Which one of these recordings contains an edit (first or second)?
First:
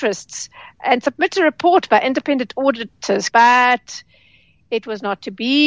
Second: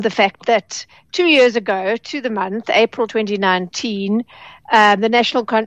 first